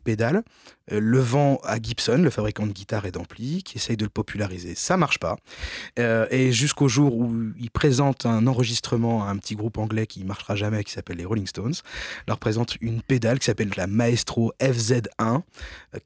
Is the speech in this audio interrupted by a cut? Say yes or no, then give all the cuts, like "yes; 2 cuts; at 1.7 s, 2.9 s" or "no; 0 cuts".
yes; 1 cut; at 13.7 s